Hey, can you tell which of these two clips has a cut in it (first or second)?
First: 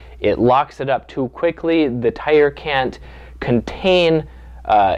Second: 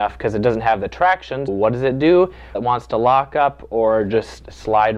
second